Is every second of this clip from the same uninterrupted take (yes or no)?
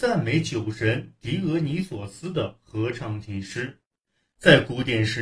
yes